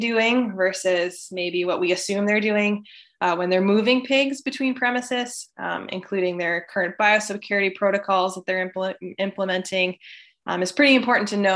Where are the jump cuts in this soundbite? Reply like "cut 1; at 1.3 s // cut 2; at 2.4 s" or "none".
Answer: none